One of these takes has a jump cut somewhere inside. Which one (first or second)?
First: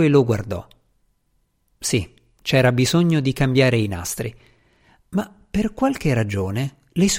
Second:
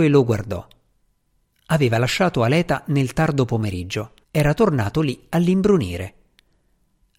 second